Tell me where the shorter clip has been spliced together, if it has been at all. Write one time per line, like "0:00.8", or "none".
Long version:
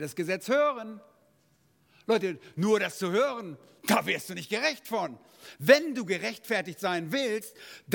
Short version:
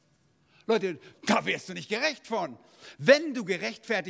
0:01.1